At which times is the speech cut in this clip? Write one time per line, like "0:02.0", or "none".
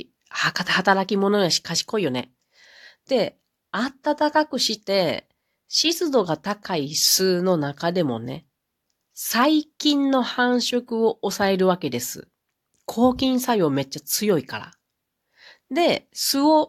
none